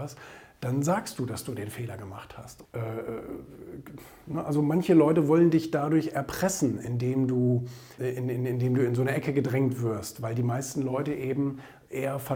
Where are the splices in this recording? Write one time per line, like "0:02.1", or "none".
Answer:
0:02.6
0:08.0